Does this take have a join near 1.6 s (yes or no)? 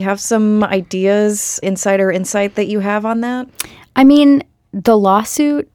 yes